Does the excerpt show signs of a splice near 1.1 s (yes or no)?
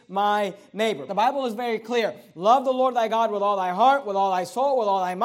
yes